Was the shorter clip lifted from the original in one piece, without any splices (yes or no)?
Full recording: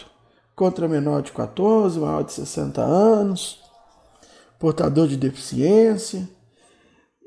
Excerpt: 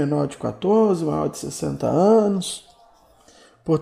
yes